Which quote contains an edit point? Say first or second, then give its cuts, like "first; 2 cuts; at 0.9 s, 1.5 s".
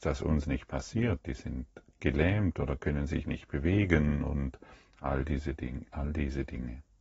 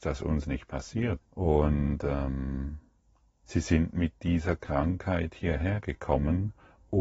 second; 1 cut; at 1.2 s